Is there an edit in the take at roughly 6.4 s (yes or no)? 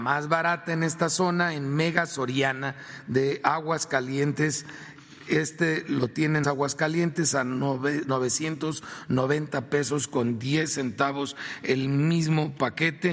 yes